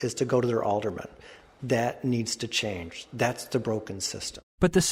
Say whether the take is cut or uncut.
uncut